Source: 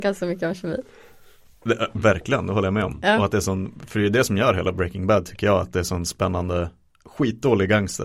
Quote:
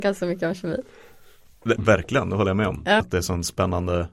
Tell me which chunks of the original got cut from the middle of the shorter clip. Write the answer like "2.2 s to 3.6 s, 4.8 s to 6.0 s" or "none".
1.8 s to 1.9 s, 3.2 s to 5.6 s